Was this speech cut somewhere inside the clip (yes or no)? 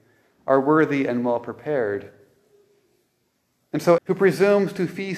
yes